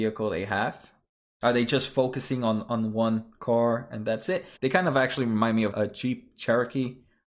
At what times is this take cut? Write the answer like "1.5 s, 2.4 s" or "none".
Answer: 4.6 s, 5.7 s